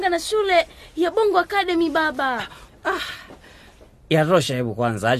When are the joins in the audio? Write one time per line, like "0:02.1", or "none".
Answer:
0:02.7